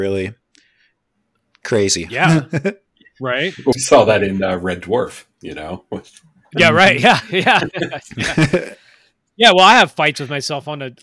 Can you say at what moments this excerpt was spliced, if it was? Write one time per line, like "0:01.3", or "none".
0:03.7